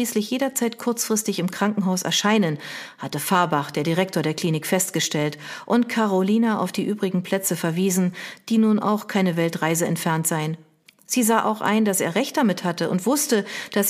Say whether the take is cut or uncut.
uncut